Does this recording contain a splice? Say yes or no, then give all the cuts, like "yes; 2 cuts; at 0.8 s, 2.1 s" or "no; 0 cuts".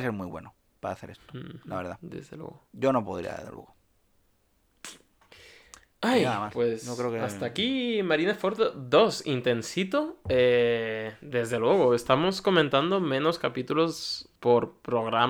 yes; 1 cut; at 14.4 s